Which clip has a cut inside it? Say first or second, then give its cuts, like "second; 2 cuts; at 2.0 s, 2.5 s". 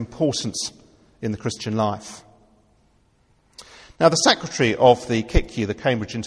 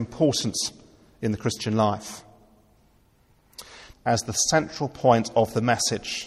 second; 1 cut; at 3.9 s